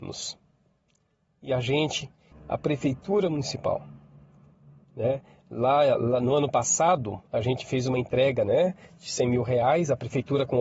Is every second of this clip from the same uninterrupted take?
no; 1 cut; at 2.3 s

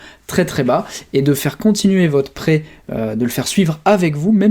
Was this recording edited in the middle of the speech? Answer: no; 0 cuts

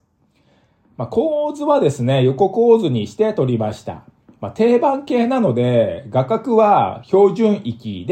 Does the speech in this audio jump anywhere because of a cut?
no; 0 cuts

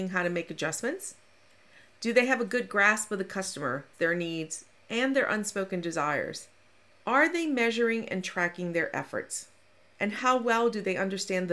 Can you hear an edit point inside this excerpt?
yes; 2 cuts; at 3.9 s, 7.0 s

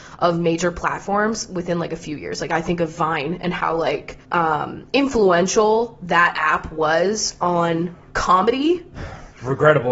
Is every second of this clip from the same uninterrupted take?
no; 1 cut; at 4.2 s

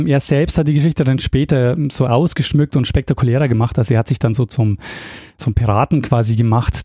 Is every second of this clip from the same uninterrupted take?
yes; 0 cuts

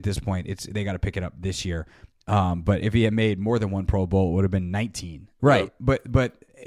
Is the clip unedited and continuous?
no; 1 cut; at 5.4 s

